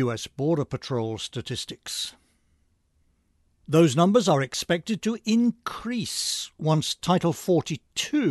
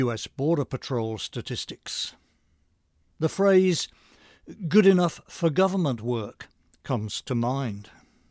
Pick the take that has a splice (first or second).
second